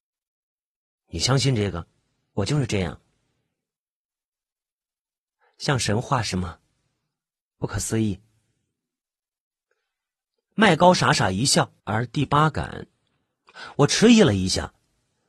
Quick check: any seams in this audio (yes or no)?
yes